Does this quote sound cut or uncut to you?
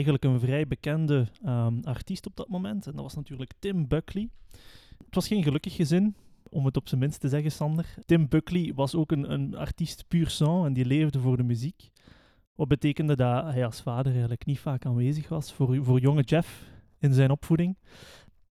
cut